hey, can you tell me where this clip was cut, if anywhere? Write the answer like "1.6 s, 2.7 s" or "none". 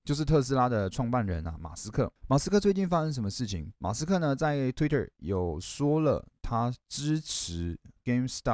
3.8 s